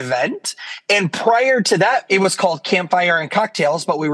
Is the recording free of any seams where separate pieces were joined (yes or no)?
no